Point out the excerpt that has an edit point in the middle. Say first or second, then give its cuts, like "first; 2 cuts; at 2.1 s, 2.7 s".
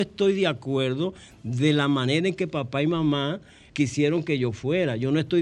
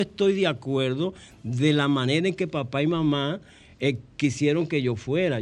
first; 1 cut; at 3.7 s